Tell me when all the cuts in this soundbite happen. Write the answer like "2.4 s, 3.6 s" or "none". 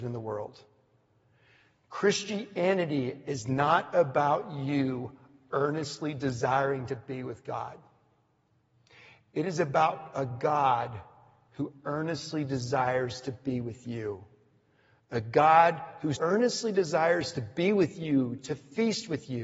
16.2 s